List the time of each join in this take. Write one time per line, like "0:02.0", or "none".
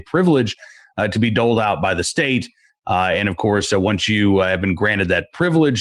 none